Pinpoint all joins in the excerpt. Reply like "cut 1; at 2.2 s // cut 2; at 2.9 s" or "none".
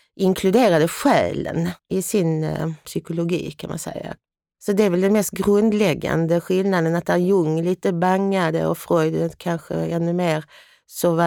none